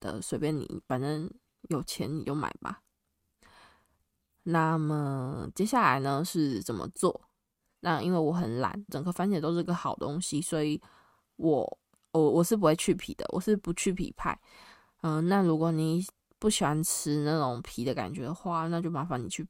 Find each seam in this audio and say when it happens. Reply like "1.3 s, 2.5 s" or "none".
7.8 s, 8.9 s